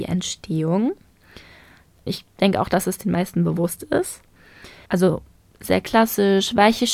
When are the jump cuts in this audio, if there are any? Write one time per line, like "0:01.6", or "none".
0:02.1
0:04.9